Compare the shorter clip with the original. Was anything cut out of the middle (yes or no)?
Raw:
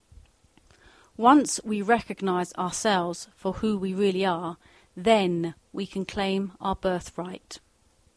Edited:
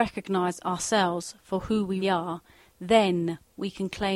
yes